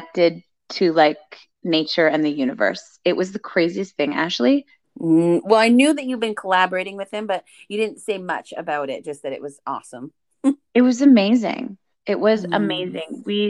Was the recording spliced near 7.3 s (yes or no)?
no